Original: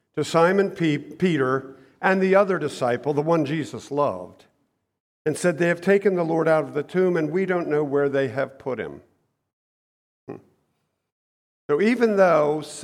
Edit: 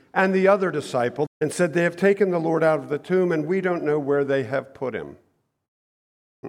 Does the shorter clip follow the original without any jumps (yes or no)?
no